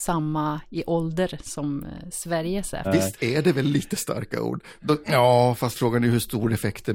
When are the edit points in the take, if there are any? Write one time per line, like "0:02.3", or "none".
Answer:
0:02.8
0:05.0